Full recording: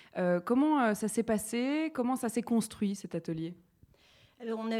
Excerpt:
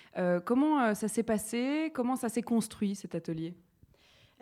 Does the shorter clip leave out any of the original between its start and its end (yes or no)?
no